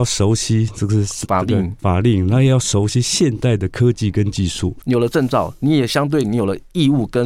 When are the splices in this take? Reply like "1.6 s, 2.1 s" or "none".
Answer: 4.8 s